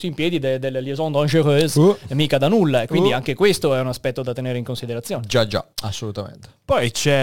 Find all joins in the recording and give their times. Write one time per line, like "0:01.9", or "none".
0:05.7